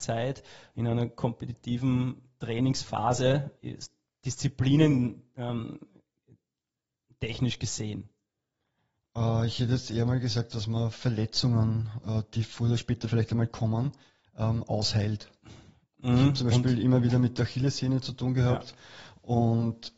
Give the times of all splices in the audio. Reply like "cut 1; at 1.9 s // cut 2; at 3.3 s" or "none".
cut 1; at 3.6 s